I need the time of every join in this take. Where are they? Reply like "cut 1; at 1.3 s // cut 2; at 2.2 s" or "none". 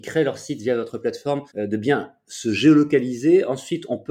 cut 1; at 1.5 s